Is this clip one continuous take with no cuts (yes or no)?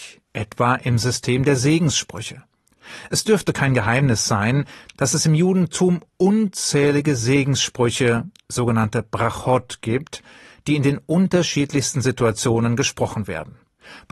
yes